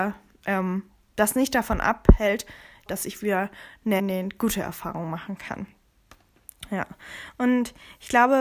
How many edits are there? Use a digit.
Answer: 2